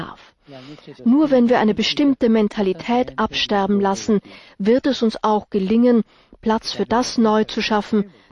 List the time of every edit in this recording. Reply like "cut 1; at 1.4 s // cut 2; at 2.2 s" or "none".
cut 1; at 1.0 s